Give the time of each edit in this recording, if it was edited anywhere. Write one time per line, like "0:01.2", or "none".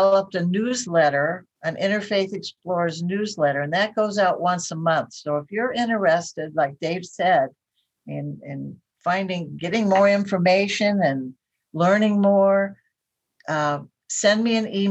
0:01.5